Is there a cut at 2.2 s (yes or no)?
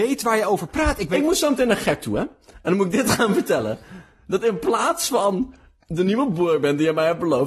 no